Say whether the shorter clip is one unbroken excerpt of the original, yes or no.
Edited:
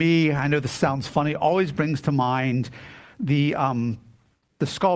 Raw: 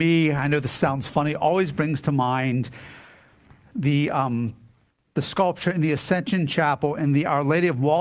no